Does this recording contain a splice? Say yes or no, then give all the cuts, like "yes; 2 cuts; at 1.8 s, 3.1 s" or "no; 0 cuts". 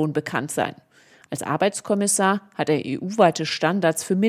no; 0 cuts